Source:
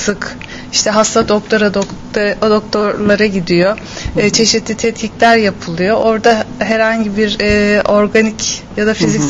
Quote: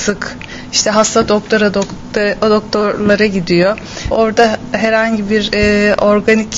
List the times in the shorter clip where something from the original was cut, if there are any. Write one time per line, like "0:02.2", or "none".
0:04.1